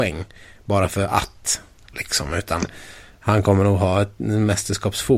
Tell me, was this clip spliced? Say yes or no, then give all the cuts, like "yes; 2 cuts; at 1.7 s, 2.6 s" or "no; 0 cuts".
no; 0 cuts